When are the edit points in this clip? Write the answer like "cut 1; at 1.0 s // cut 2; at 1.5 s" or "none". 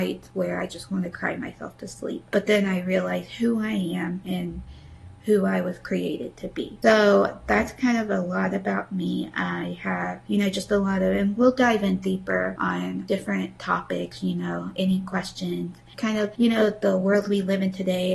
cut 1; at 15.9 s